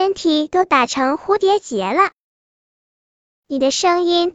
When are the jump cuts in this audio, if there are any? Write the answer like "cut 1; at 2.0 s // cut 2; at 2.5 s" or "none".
cut 1; at 3.3 s

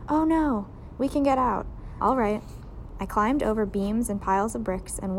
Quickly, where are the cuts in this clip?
cut 1; at 1.0 s // cut 2; at 2.0 s

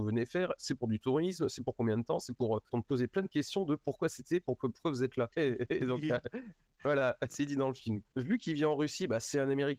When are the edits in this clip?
cut 1; at 2.7 s // cut 2; at 5.3 s // cut 3; at 7.3 s

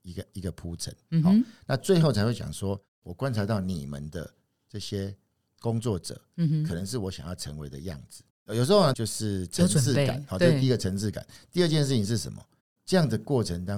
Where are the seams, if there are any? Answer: cut 1; at 8.9 s

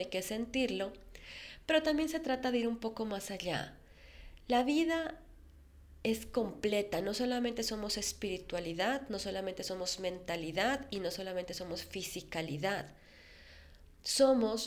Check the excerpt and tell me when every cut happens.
none

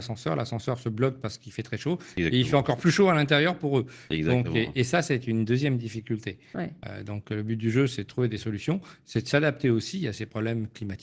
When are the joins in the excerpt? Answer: none

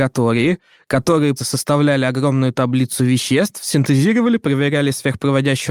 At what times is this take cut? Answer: cut 1; at 1.4 s

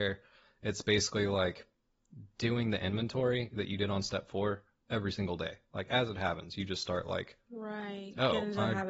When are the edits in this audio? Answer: none

